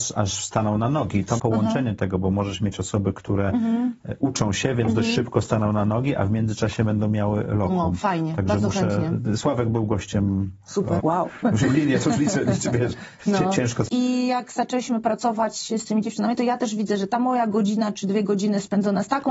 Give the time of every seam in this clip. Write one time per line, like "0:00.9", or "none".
0:01.4
0:11.0
0:13.9

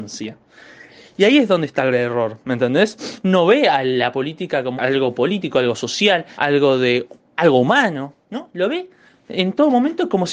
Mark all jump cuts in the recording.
0:04.8
0:06.3

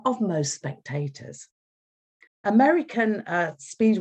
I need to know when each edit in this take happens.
0:02.3

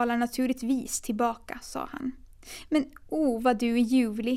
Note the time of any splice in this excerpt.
none

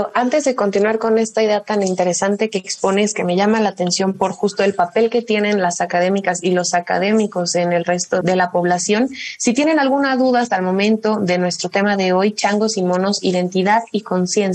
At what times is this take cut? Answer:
0:08.2

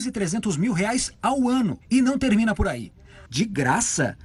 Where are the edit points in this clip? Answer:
0:01.8
0:03.3

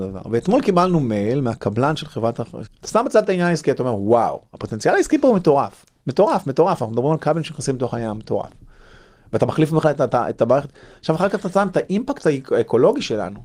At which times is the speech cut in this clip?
0:02.6

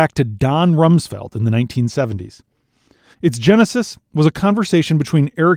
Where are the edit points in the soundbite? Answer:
0:03.1

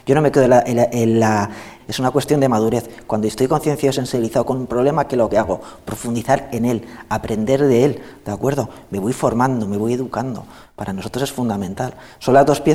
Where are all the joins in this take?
0:01.8

